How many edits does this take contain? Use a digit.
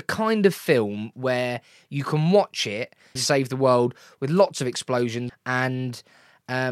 2